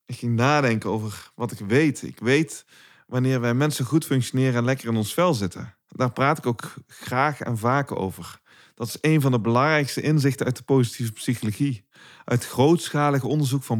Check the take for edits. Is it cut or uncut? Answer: uncut